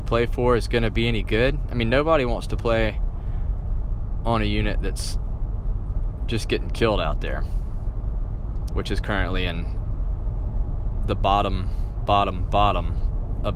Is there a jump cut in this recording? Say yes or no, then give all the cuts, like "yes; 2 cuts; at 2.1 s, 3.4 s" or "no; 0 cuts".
yes; 1 cut; at 8.7 s